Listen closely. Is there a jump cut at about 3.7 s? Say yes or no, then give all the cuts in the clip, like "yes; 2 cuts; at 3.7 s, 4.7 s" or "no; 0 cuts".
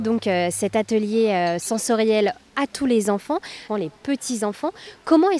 yes; 1 cut; at 3.7 s